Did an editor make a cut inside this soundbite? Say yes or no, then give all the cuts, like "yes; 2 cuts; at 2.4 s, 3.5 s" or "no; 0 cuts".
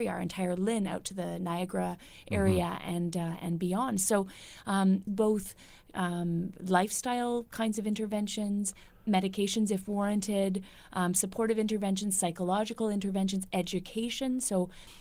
yes; 1 cut; at 5.1 s